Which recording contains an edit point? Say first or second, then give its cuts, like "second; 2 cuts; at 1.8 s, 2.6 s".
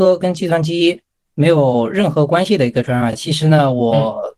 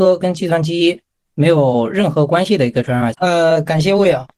second; 1 cut; at 3.1 s